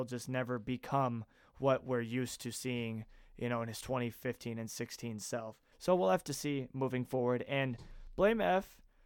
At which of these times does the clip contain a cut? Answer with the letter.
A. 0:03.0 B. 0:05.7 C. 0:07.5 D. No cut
B